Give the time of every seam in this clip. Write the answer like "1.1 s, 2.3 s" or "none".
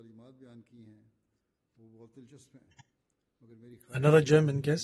none